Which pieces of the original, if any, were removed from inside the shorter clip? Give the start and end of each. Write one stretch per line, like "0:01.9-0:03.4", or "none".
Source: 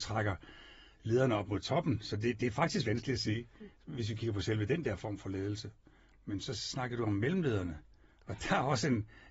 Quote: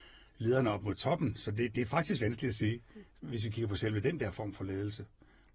none